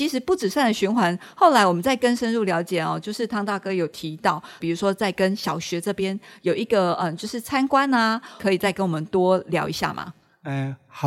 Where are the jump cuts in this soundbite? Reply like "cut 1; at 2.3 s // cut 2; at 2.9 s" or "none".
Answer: cut 1; at 4.6 s // cut 2; at 8.4 s